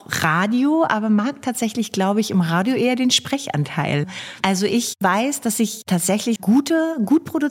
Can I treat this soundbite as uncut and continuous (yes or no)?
no